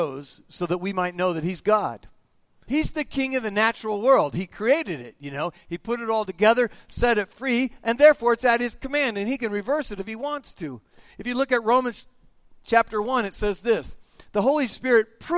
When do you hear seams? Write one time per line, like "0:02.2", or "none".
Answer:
0:02.7